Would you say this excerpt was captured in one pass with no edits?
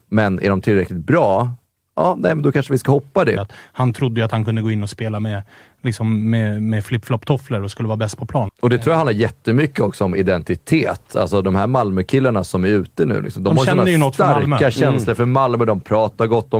no; 2 cuts; at 3.4 s, 8.5 s

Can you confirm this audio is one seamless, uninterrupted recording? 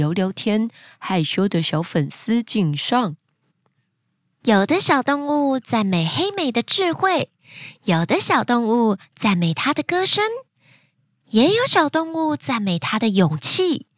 yes; 0 cuts

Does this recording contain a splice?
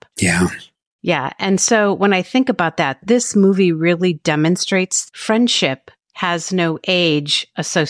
no; 0 cuts

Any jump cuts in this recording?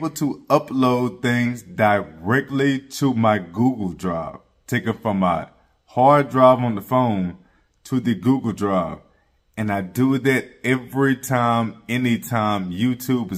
no; 0 cuts

